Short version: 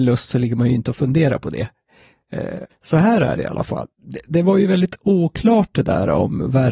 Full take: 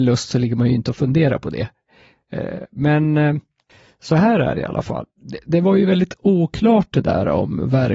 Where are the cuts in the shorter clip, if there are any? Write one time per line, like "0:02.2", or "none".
0:02.7